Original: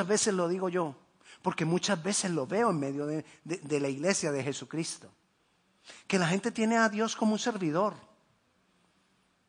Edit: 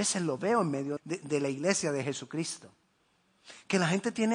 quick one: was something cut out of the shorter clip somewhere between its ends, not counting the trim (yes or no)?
yes